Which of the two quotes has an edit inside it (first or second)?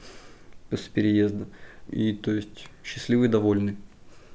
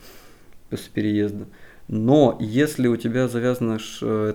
first